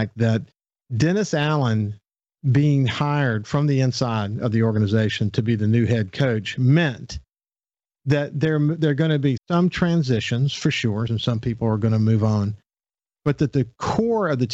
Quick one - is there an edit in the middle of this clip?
yes; 2 cuts; at 9.4 s, 11.1 s

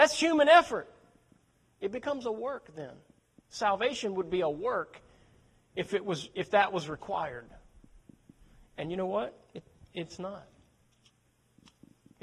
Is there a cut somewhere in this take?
no; 0 cuts

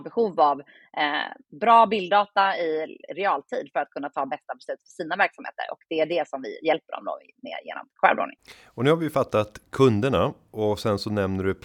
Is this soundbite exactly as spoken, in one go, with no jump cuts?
yes; 0 cuts

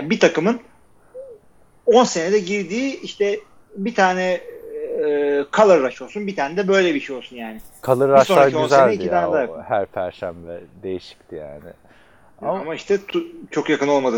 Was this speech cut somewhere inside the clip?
no; 0 cuts

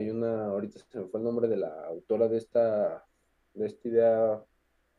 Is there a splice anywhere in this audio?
no; 0 cuts

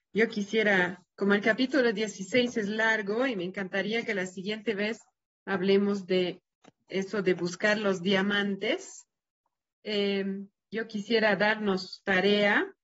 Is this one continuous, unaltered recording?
yes; 0 cuts

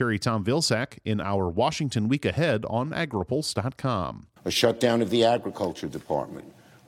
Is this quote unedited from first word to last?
no; 1 cut; at 4.4 s

